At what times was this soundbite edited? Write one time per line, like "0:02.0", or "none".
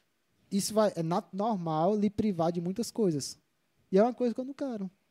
0:03.8